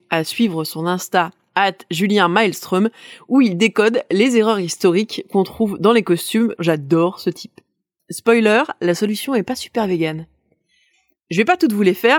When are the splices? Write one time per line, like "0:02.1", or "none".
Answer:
0:06.6
0:08.0